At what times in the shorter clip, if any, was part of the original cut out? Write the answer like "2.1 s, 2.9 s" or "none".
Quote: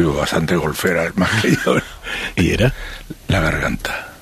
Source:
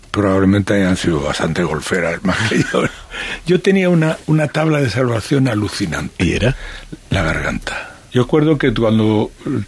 2.4 s